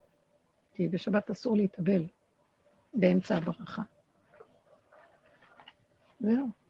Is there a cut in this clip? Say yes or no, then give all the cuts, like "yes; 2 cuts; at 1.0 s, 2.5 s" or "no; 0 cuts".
yes; 1 cut; at 2.9 s